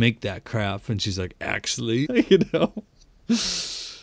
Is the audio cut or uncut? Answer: cut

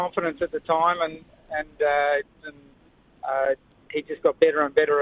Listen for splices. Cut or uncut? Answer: cut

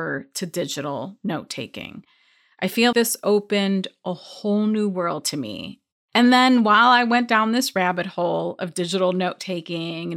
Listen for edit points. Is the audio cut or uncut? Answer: cut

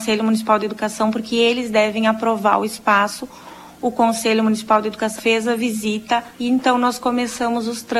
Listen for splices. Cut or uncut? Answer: cut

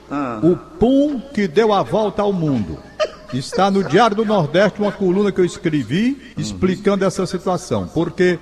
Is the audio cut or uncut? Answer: cut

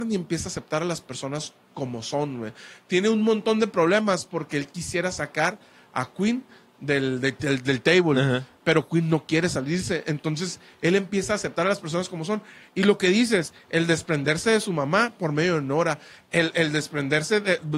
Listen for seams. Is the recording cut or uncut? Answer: uncut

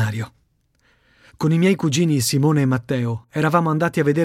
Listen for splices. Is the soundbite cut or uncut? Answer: cut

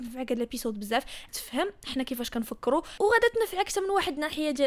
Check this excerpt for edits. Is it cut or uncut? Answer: cut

